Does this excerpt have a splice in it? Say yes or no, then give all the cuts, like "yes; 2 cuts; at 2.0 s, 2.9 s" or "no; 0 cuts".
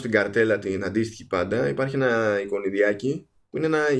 no; 0 cuts